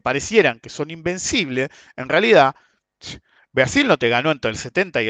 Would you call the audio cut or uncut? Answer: uncut